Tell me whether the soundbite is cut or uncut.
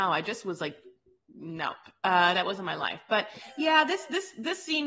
uncut